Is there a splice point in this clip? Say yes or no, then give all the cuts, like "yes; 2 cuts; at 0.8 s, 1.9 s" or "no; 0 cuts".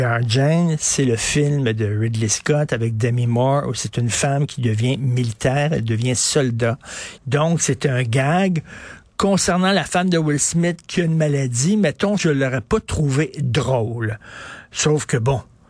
yes; 2 cuts; at 7.2 s, 12.2 s